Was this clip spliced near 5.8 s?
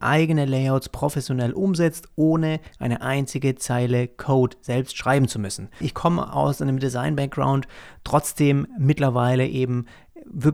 yes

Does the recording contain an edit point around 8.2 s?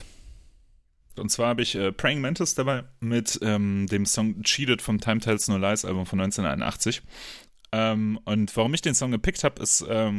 no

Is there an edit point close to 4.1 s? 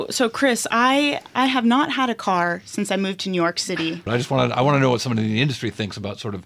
yes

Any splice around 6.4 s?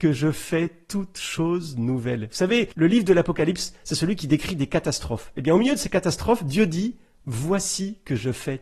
no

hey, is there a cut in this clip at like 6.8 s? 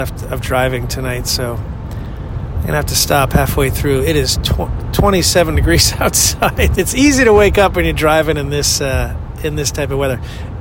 yes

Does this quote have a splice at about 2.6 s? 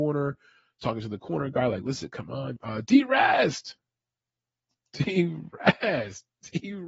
yes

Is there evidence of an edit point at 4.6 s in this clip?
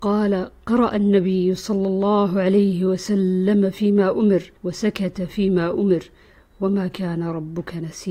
yes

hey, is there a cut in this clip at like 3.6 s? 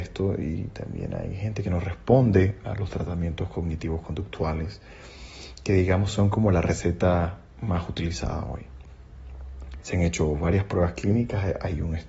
no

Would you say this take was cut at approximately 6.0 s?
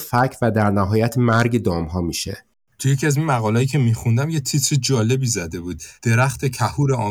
yes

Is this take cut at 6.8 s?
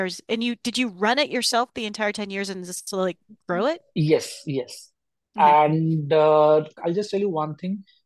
yes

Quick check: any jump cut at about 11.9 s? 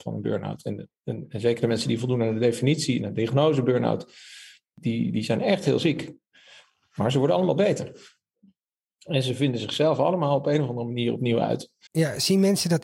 yes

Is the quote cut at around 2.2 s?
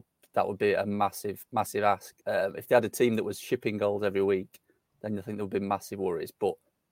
yes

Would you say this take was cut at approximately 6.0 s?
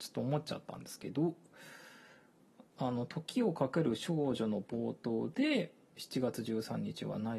yes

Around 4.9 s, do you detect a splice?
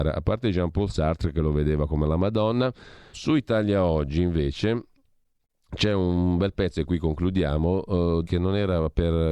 no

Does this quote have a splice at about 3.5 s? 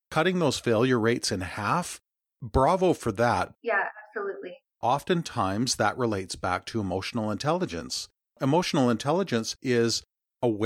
yes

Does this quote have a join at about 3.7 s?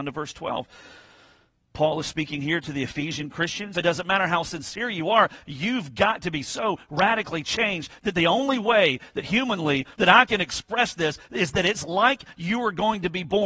yes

